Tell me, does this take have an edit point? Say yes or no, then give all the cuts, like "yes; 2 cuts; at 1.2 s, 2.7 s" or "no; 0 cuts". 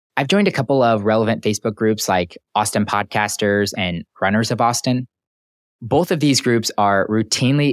no; 0 cuts